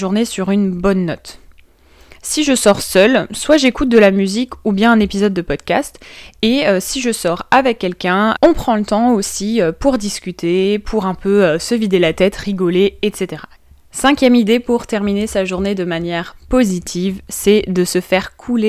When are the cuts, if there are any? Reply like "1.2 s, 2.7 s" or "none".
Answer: none

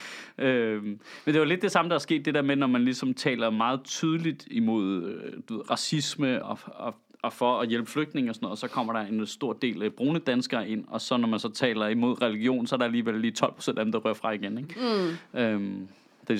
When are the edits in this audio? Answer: 6.4 s

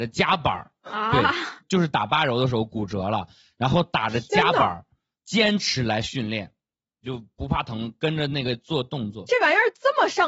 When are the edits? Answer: none

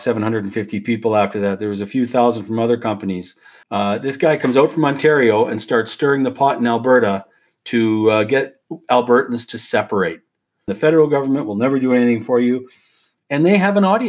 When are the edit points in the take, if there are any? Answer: 3.6 s, 10.7 s

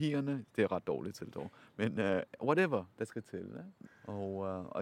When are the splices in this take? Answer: 3.8 s

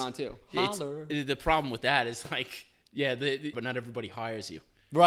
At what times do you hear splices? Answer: 3.5 s

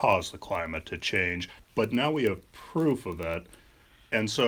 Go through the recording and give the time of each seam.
1.6 s

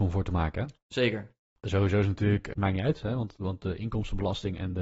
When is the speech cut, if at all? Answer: 2.6 s

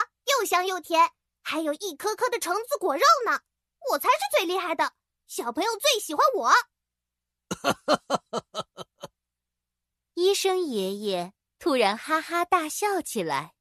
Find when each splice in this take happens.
none

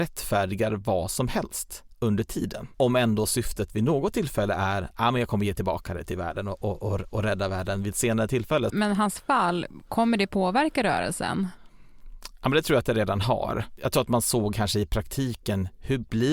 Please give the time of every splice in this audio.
2.7 s, 8.7 s

